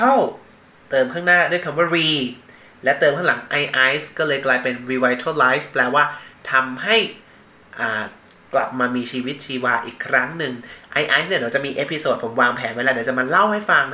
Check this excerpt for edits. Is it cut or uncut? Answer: uncut